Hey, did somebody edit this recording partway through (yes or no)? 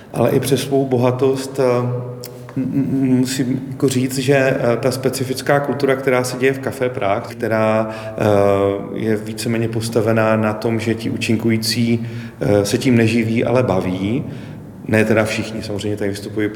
yes